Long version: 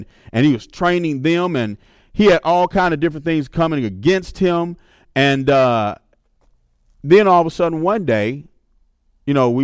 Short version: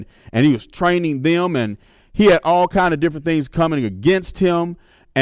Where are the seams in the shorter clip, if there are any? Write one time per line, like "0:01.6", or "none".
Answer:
none

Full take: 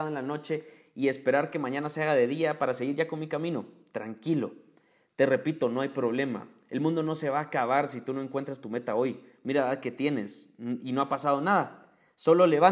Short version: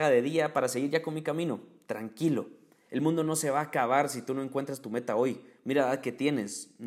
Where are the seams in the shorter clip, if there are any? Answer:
0:02.9

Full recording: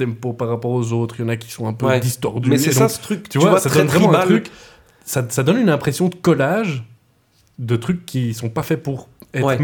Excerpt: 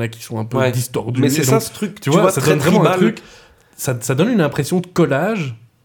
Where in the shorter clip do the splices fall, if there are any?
none

